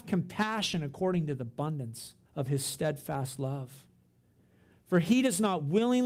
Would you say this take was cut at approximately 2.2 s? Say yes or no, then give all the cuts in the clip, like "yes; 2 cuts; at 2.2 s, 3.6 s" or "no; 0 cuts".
yes; 1 cut; at 2.2 s